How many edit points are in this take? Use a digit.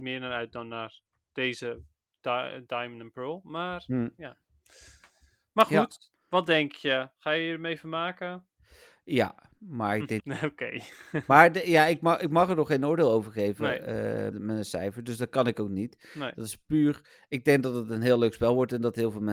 2